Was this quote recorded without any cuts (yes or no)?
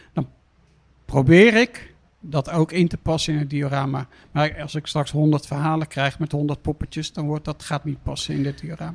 yes